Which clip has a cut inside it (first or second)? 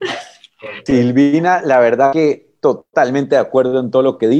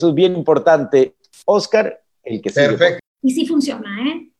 second